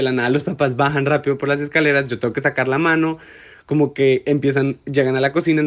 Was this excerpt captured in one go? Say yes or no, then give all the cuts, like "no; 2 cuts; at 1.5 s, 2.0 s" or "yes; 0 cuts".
yes; 0 cuts